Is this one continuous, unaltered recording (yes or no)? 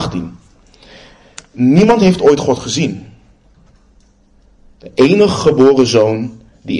yes